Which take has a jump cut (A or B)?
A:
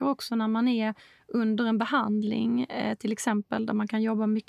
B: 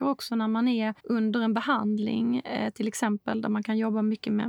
B